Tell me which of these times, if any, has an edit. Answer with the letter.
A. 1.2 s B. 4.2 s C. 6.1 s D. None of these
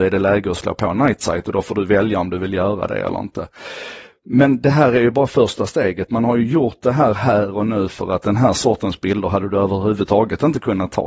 D